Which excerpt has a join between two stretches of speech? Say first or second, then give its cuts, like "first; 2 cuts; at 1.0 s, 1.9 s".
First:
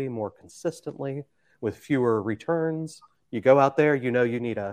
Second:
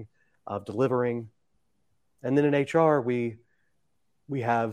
first; 1 cut; at 3.2 s